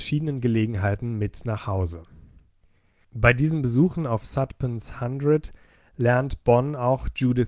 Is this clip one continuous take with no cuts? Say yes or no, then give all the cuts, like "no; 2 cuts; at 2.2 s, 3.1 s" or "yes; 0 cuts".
yes; 0 cuts